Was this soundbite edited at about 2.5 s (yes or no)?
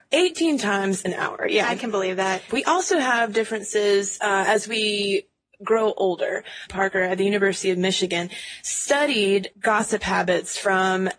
yes